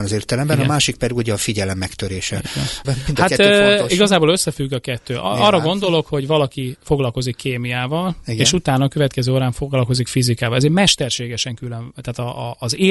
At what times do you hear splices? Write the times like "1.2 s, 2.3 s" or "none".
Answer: 2.8 s